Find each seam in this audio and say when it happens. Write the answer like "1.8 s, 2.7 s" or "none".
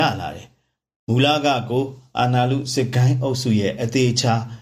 none